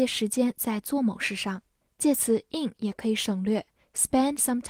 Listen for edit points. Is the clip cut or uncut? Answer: uncut